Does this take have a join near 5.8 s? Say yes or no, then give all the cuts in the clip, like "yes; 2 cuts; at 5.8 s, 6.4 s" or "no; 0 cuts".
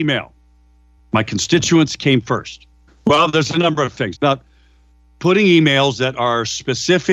no; 3 cuts; at 1.0 s, 2.9 s, 4.1 s